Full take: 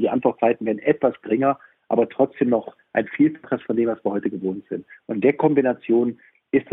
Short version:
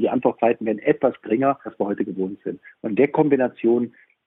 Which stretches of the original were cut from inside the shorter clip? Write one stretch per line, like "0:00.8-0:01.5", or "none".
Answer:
0:01.7-0:03.9